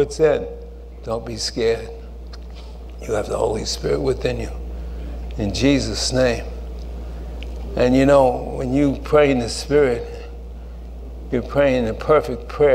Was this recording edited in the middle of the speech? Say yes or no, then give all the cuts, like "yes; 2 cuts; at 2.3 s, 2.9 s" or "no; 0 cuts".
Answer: no; 0 cuts